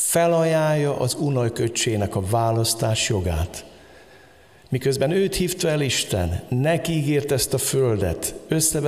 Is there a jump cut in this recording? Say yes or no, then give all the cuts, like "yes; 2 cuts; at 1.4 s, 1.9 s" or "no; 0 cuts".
no; 0 cuts